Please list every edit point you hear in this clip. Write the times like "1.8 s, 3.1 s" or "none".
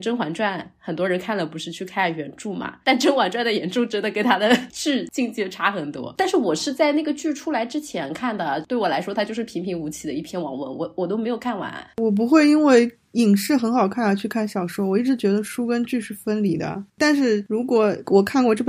12.0 s